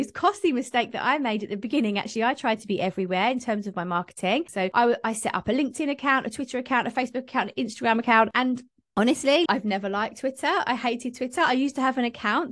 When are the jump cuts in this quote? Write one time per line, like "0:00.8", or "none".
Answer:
0:04.5
0:08.3
0:09.5